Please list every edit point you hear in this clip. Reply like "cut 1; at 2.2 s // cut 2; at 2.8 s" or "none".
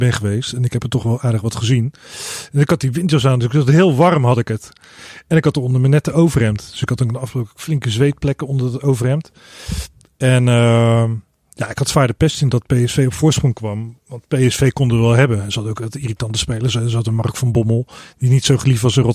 none